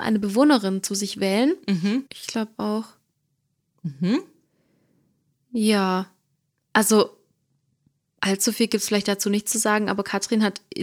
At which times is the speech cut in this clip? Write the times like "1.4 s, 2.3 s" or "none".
2.1 s

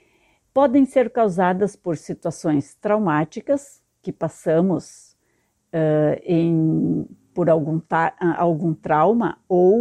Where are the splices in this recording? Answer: none

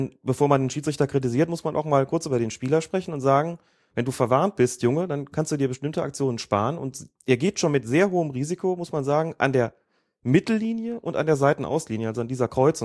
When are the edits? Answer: 7.2 s

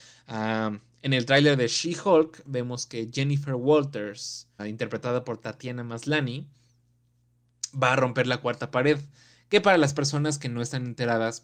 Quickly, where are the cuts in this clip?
4.6 s

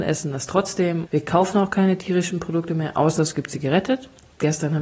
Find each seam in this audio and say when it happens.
1.1 s

